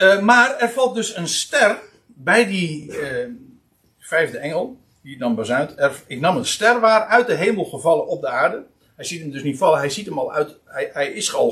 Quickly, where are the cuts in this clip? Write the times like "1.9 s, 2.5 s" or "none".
none